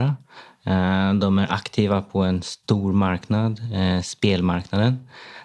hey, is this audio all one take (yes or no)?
yes